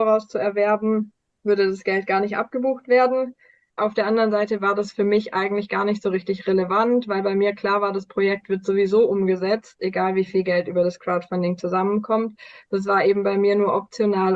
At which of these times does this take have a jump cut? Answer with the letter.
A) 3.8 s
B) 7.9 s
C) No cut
A